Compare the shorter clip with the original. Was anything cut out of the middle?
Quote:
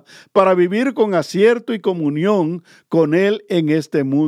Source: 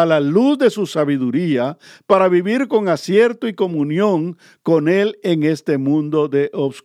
no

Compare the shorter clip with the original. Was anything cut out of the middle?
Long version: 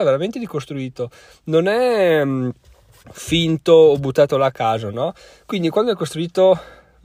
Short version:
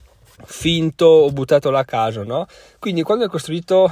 no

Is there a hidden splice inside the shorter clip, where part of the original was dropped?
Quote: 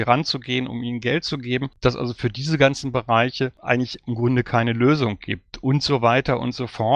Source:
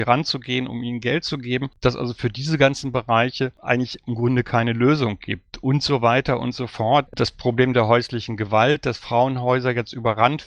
no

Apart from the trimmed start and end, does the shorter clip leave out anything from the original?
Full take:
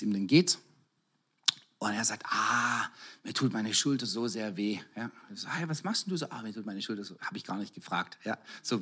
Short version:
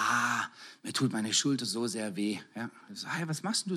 no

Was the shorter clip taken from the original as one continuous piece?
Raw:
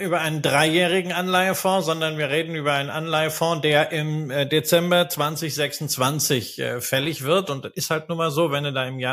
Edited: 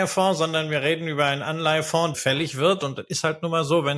no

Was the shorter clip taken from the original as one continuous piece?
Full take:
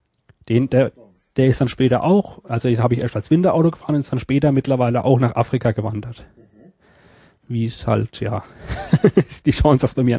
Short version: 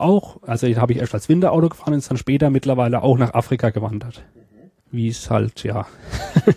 no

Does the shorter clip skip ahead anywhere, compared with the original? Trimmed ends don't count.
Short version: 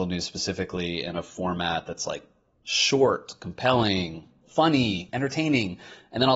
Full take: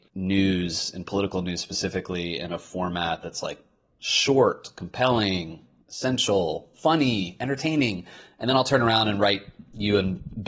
yes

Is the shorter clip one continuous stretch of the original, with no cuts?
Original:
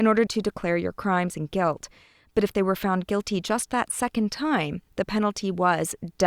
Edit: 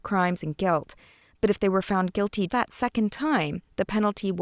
no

